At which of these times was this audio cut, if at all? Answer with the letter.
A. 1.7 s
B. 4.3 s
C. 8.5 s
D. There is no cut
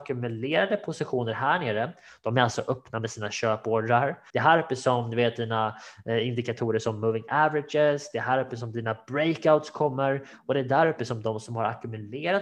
B